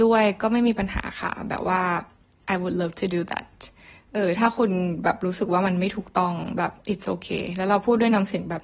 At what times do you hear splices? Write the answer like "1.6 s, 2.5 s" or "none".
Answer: none